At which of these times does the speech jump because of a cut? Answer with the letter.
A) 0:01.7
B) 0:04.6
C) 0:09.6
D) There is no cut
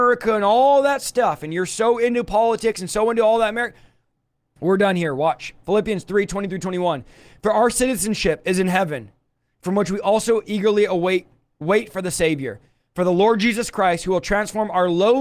B